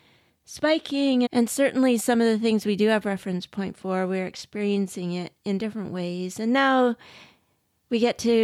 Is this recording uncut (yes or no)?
no